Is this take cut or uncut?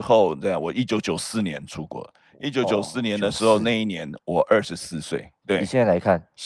cut